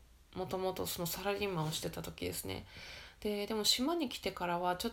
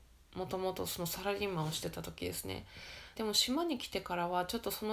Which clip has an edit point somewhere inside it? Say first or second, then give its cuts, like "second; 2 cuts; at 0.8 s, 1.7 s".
second; 1 cut; at 3.2 s